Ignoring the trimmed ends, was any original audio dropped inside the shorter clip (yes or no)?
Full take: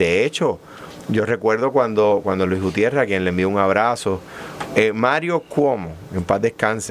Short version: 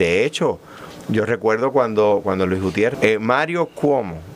yes